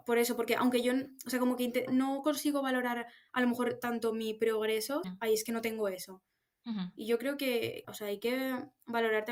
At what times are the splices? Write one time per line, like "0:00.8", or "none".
0:01.9
0:05.0
0:07.8